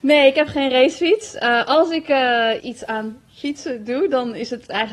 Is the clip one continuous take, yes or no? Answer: no